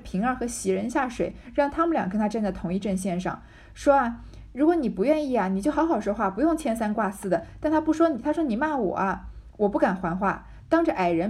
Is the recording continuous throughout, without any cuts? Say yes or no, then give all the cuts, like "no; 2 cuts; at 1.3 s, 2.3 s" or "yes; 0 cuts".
yes; 0 cuts